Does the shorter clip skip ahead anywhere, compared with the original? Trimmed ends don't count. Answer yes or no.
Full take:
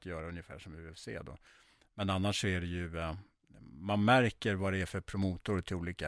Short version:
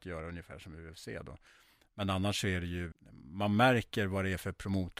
yes